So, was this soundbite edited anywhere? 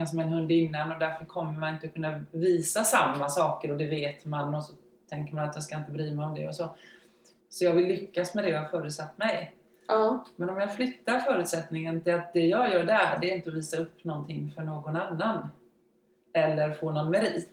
yes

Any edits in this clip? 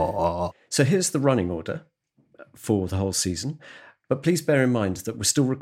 no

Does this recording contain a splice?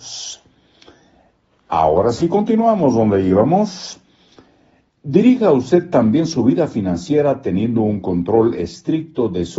no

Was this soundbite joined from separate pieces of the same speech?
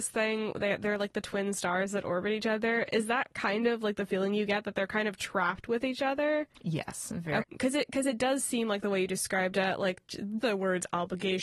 yes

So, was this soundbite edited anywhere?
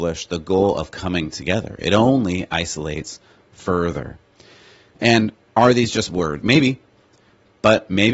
yes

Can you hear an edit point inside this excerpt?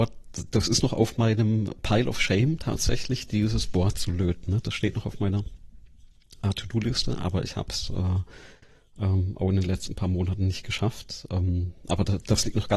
no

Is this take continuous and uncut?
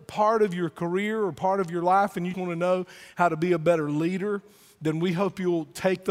no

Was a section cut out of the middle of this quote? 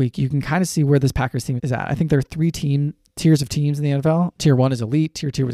yes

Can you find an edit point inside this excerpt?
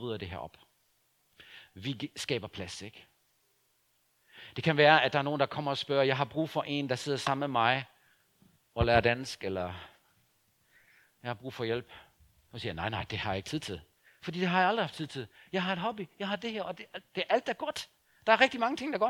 no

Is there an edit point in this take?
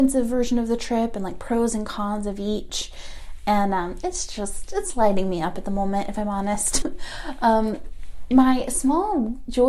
yes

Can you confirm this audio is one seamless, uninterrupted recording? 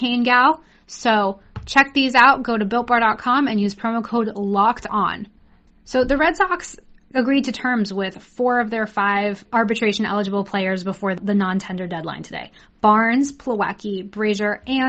yes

